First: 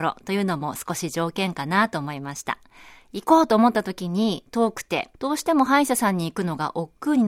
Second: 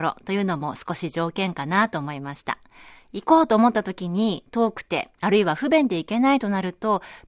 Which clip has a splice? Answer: first; 1 cut; at 5.1 s

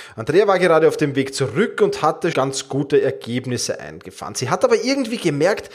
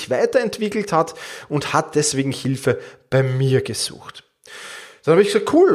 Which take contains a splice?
first; 1 cut; at 2.3 s

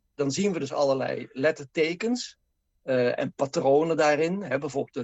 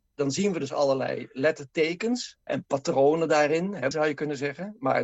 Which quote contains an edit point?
second; 2 cuts; at 2.5 s, 3.9 s

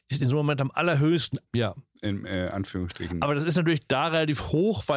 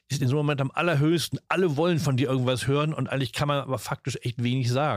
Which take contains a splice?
first; 1 cut; at 1.5 s

